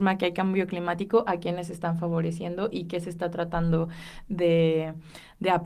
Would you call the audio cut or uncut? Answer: uncut